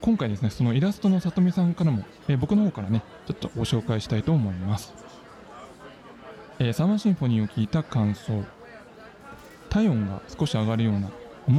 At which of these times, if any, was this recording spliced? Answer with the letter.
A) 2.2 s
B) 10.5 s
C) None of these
A